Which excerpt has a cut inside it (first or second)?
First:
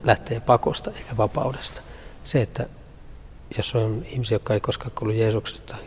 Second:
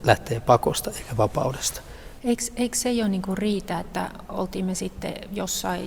second